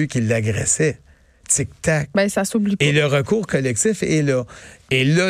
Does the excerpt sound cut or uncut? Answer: uncut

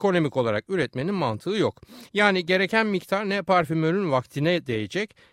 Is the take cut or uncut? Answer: uncut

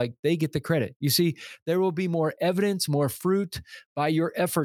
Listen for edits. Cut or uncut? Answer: uncut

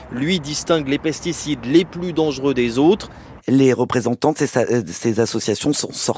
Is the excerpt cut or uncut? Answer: cut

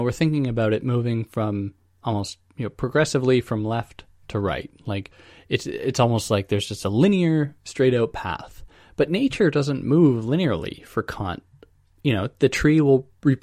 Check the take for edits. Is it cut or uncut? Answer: uncut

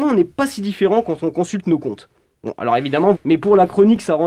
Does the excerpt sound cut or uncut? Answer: cut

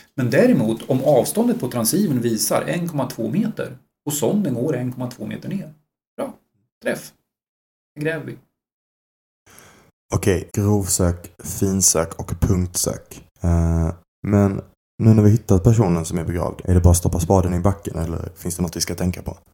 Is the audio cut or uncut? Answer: cut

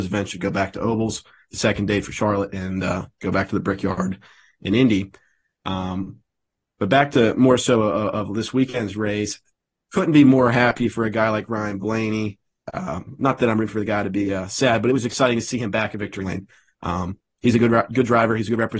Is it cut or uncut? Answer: cut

